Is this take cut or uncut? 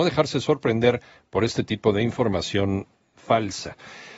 uncut